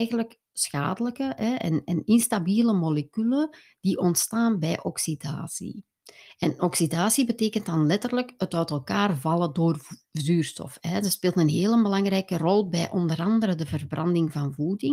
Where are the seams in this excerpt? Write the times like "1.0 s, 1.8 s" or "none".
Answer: none

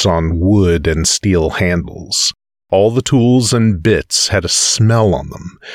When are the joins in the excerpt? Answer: 2.6 s

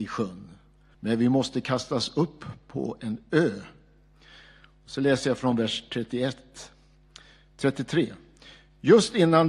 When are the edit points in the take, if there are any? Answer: 0.9 s

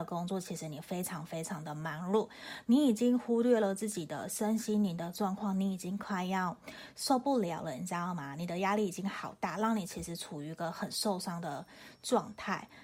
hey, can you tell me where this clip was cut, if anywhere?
none

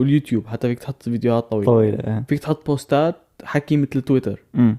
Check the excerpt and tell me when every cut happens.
none

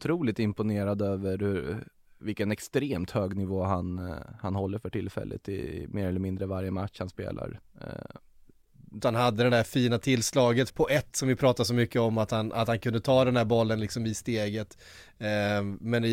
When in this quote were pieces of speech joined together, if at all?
9.0 s, 10.7 s

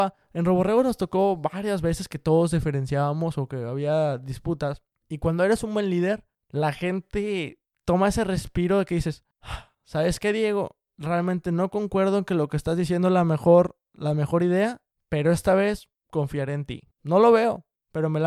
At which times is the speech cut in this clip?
16.9 s

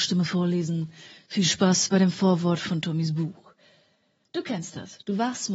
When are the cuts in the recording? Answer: none

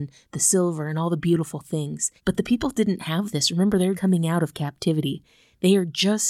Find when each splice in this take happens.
2.2 s, 3.9 s

